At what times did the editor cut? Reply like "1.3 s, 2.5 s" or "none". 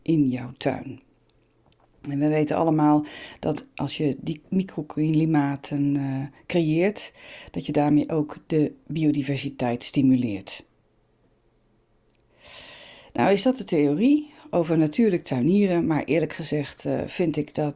none